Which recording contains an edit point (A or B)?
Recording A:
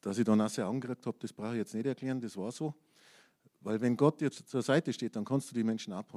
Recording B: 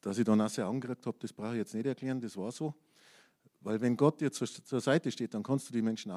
A